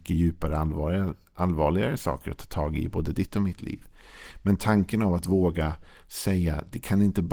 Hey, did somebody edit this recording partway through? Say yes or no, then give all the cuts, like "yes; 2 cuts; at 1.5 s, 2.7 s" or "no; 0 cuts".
no; 0 cuts